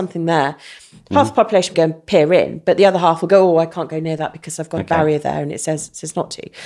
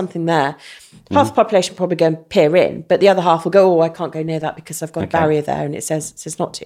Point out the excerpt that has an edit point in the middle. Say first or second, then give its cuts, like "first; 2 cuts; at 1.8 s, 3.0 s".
first; 1 cut; at 1.7 s